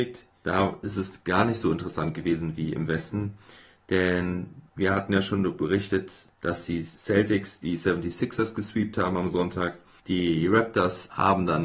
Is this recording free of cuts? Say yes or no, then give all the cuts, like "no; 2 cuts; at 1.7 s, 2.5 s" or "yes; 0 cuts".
yes; 0 cuts